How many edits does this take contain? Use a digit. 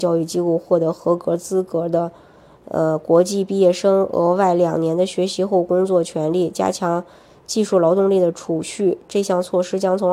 0